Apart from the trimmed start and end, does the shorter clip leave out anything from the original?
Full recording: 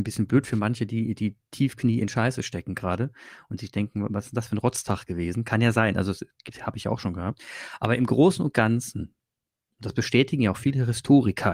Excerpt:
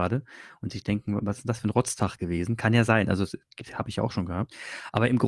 no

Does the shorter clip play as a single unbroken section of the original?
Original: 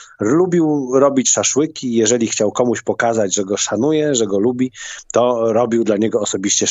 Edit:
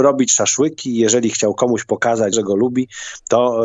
no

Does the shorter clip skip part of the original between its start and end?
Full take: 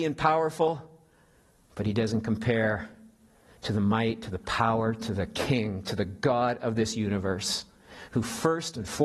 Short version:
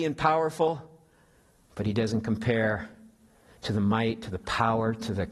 no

